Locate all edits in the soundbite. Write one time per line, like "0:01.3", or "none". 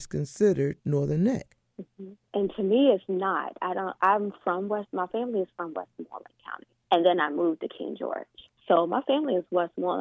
0:08.6